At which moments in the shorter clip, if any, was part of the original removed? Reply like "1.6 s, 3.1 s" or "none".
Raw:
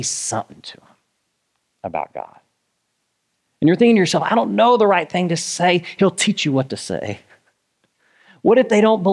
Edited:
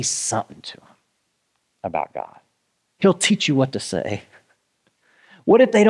3.0 s